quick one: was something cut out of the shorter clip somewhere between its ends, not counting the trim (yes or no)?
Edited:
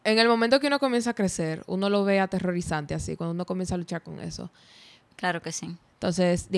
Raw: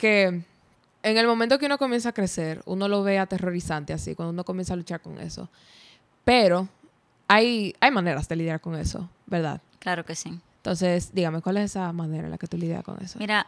yes